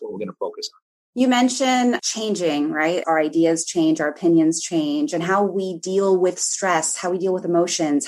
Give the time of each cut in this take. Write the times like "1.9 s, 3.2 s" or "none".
3.0 s